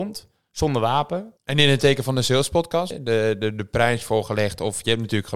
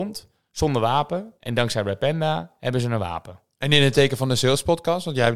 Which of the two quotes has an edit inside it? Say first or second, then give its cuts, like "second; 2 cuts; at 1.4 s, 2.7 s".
first; 2 cuts; at 1.4 s, 2.9 s